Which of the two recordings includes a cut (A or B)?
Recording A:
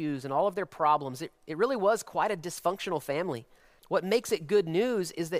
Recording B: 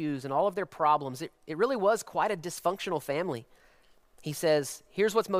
A